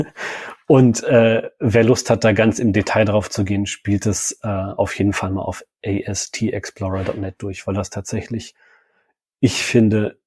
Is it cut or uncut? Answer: uncut